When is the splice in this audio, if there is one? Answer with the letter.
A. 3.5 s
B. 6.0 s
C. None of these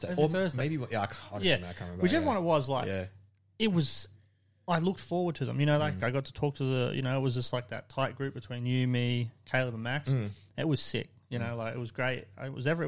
B